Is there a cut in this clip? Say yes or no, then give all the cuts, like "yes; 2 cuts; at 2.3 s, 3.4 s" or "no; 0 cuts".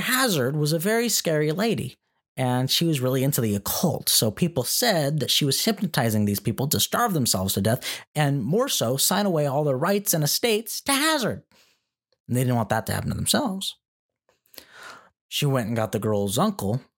yes; 1 cut; at 15.1 s